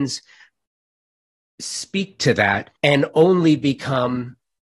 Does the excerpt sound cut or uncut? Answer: cut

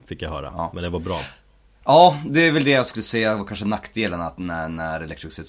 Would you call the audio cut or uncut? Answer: uncut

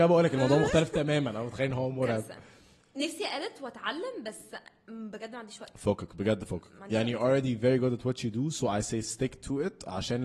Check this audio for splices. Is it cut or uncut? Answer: uncut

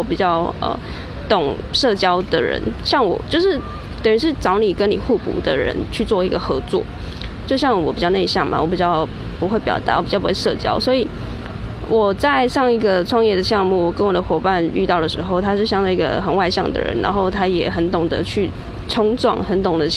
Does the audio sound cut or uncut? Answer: uncut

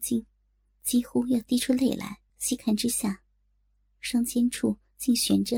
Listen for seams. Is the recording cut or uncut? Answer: cut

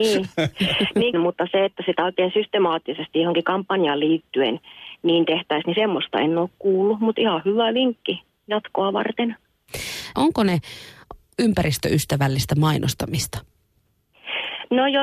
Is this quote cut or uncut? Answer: cut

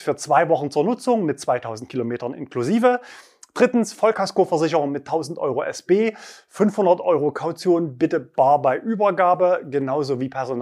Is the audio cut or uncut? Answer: uncut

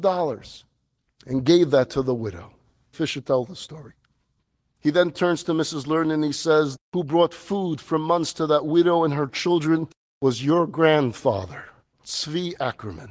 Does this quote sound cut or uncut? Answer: cut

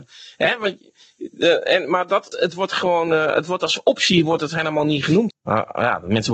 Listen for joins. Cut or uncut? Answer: cut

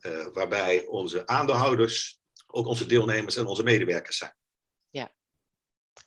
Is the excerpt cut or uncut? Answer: uncut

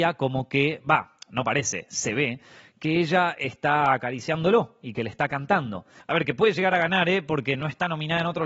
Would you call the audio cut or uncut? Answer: cut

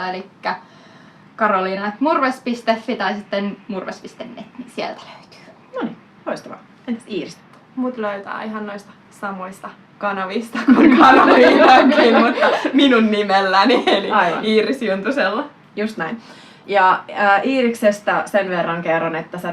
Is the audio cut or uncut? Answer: uncut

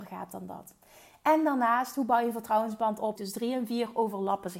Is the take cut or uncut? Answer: cut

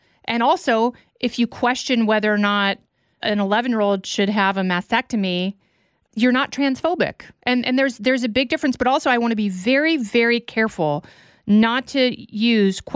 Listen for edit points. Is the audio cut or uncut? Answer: uncut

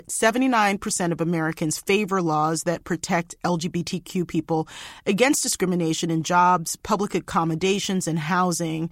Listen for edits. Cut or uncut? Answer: uncut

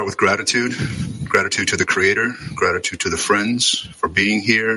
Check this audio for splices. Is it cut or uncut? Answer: uncut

